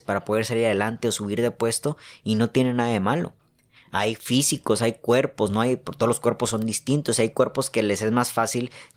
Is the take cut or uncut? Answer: uncut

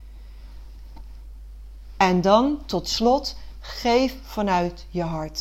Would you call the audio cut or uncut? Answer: uncut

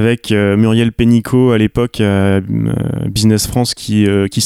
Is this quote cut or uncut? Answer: uncut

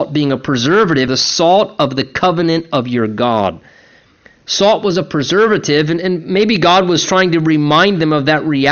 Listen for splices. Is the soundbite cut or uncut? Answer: cut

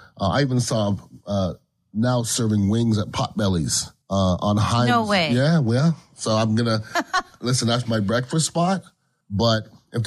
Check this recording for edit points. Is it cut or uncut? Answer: cut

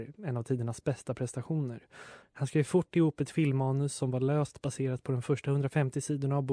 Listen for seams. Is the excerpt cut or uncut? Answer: cut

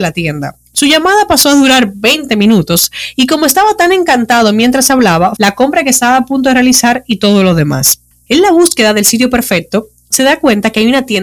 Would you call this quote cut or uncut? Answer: cut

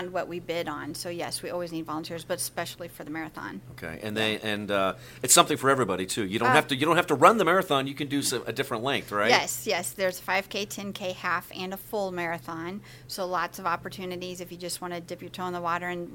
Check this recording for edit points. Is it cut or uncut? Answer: uncut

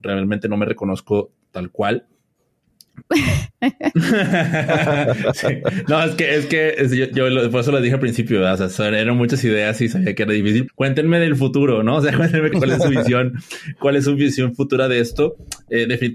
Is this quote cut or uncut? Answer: cut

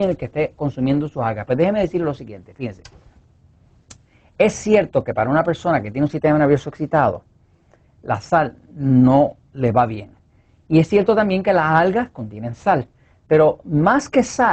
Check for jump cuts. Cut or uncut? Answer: uncut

